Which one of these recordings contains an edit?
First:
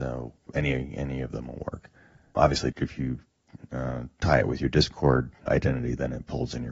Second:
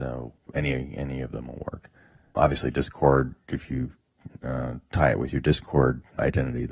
first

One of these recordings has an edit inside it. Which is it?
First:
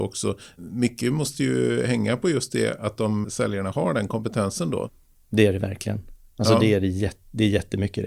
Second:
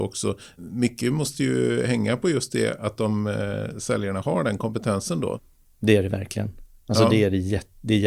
first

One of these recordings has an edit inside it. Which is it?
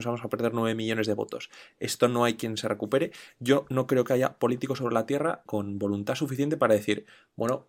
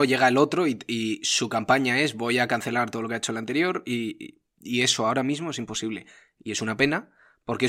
first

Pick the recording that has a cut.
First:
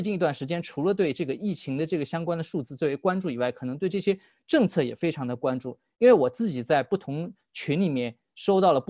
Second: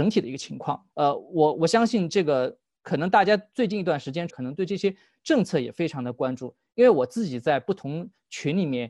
second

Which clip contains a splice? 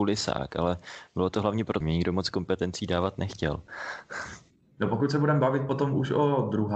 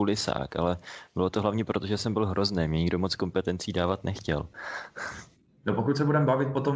first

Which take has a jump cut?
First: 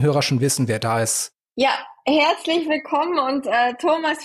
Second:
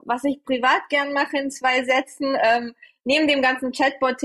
first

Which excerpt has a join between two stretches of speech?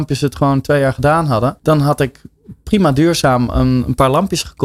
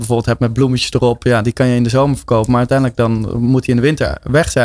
first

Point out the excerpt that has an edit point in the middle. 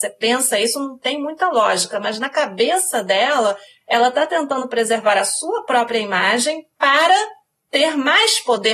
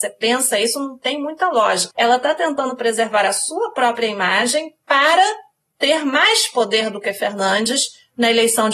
second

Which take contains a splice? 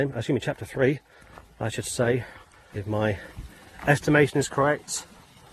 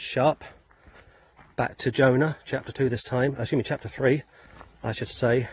first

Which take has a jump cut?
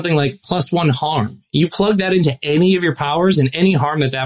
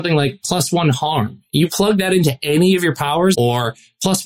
second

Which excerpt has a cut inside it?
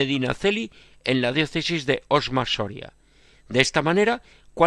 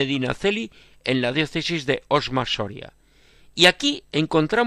first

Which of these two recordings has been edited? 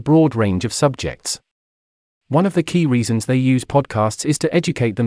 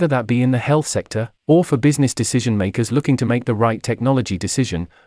second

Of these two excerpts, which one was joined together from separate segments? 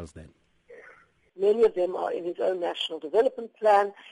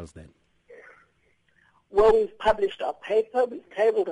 first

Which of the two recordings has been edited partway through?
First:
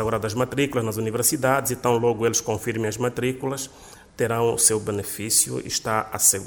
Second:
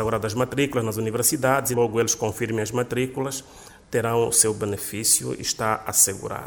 second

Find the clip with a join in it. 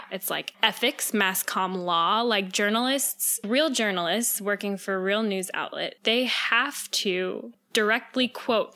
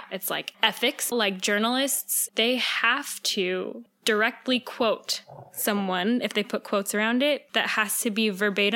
second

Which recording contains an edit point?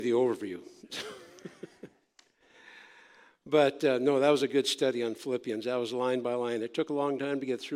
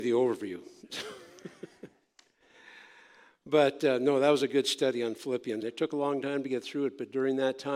second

